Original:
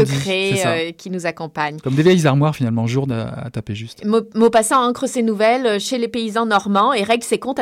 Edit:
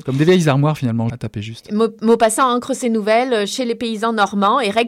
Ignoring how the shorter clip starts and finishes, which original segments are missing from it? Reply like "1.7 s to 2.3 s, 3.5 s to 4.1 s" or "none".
2.9 s to 3.4 s